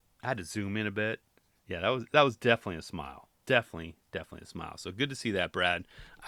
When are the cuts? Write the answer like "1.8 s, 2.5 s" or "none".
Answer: none